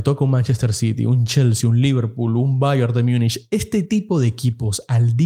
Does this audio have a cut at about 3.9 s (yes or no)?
no